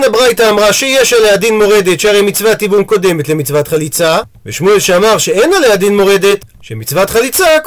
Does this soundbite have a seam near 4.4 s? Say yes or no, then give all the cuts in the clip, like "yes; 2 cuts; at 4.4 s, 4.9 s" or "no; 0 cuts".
no; 1 cut; at 6.6 s